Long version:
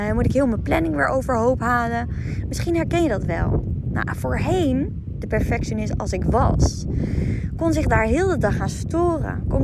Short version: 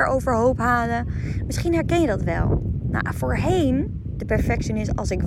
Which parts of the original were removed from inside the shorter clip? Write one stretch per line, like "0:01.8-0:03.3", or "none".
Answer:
none